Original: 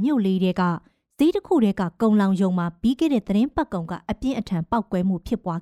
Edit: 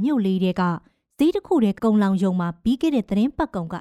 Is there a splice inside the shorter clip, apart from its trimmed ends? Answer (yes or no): yes